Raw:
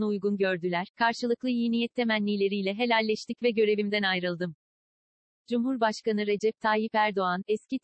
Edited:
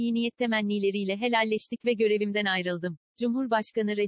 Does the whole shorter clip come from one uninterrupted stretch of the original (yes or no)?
no